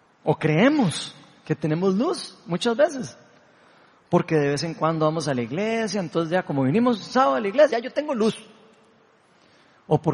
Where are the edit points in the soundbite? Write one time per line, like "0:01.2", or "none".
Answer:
0:07.7